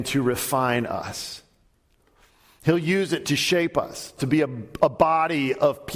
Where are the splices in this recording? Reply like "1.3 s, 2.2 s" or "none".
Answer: 4.2 s

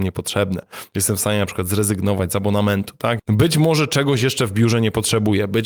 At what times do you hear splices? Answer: 3.2 s

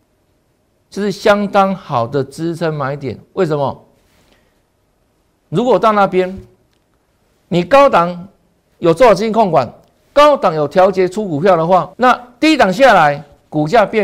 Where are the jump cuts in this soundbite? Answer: 11.9 s

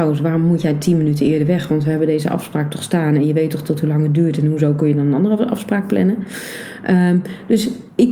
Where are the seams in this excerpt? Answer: none

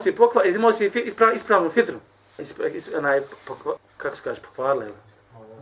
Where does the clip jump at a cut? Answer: 2.4 s, 3.8 s

